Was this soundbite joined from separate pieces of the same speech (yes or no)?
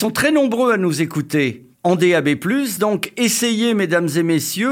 no